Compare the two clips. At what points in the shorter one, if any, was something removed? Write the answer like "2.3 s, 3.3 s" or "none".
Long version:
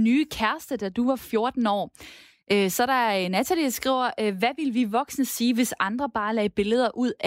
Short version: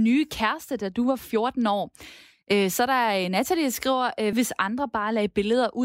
4.3 s